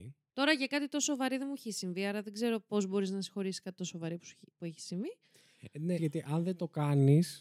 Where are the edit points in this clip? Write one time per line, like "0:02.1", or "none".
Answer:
0:06.0